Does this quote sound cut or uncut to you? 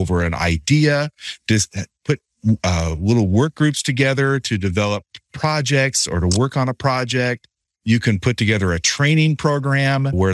uncut